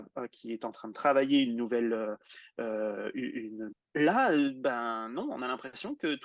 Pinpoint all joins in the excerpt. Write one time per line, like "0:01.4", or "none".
0:03.7